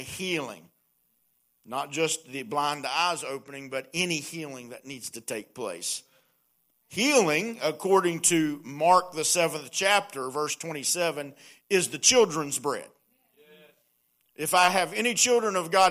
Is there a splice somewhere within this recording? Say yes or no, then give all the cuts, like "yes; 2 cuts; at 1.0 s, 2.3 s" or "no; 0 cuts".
no; 0 cuts